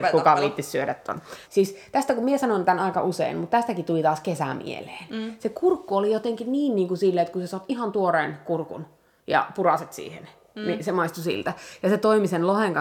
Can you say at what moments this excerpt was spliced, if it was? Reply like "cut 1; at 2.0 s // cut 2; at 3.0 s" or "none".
cut 1; at 1.4 s